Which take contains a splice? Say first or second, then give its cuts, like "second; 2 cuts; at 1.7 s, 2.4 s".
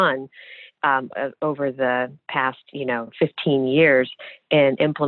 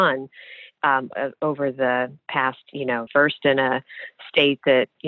second; 1 cut; at 3.1 s